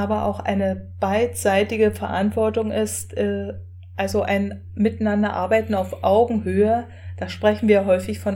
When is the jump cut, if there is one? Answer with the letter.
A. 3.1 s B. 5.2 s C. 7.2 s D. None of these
D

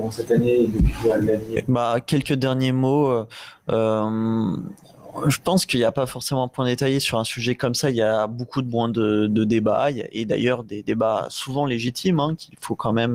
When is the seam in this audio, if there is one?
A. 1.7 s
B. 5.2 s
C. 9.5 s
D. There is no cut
D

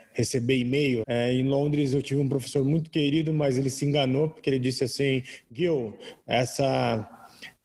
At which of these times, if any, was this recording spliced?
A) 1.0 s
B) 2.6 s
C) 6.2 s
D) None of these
A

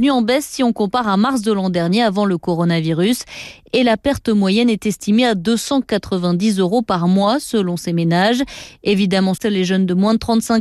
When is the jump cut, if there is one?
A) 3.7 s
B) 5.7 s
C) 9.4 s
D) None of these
C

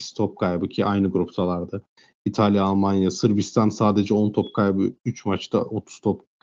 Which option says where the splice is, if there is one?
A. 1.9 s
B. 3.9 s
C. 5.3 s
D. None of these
D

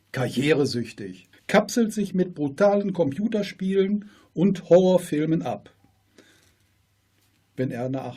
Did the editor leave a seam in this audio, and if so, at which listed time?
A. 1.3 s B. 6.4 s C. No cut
A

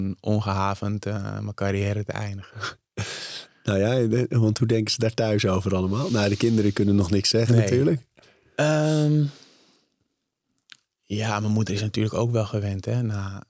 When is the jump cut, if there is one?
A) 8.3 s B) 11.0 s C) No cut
C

